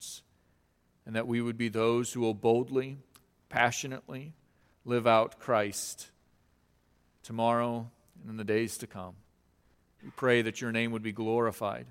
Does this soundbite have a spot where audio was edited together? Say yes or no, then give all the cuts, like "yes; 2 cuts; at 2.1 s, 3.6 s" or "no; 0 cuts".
yes; 1 cut; at 9.9 s